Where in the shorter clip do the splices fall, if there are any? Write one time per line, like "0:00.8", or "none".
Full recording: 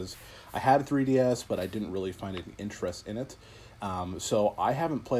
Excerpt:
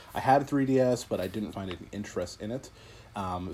0:01.5